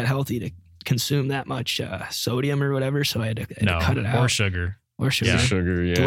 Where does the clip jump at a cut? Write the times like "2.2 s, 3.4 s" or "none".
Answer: none